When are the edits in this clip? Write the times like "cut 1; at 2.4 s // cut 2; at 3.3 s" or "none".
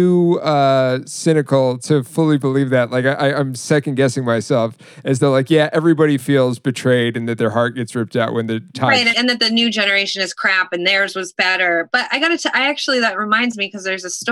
cut 1; at 9.1 s